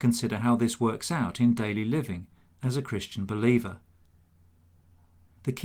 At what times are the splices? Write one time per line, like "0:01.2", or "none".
none

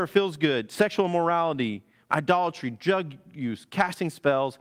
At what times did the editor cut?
0:02.1

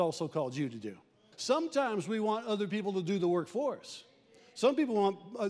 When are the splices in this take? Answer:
0:01.3

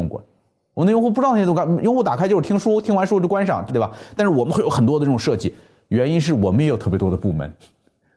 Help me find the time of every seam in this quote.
0:03.7

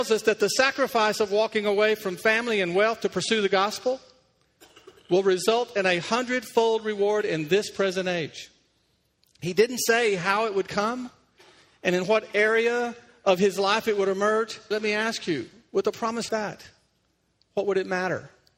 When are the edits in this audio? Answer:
0:14.7
0:16.3

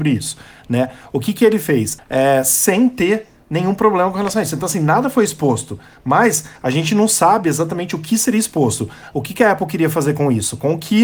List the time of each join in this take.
0:02.0
0:09.1

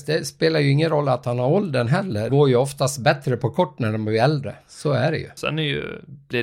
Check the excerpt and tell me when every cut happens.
0:02.3
0:05.4

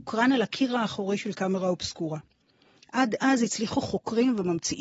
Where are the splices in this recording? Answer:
none

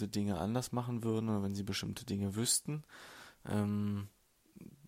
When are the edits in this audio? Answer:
0:03.3

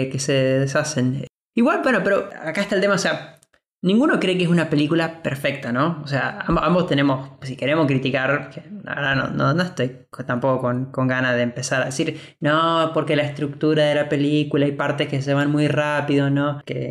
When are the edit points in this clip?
none

